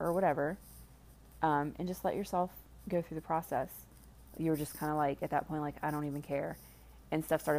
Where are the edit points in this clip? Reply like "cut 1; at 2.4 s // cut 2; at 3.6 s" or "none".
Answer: cut 1; at 4.3 s

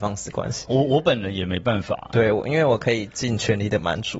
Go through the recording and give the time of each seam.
none

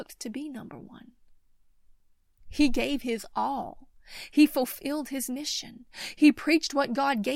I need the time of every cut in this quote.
cut 1; at 2.4 s

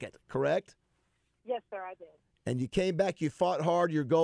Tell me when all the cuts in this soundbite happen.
none

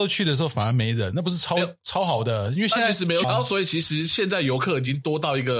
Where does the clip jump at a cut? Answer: cut 1; at 3.2 s

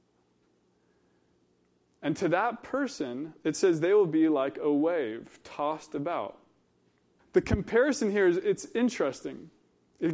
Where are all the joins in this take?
cut 1; at 7.2 s

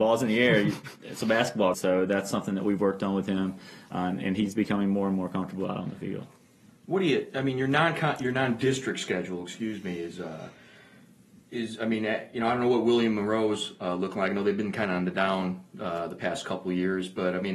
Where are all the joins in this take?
cut 1; at 1.7 s

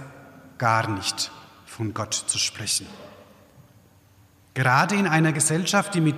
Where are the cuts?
none

